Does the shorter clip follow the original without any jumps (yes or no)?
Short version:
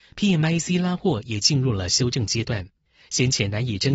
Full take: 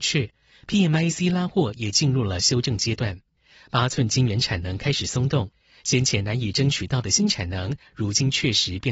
no